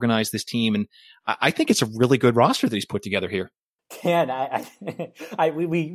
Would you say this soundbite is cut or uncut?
uncut